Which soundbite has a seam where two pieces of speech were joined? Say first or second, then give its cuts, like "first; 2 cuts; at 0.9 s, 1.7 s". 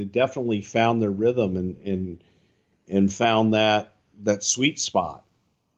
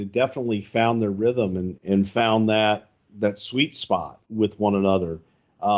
second; 2 cuts; at 1.8 s, 4.2 s